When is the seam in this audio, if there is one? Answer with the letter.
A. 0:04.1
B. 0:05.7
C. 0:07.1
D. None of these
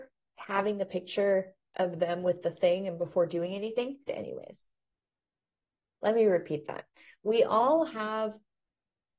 A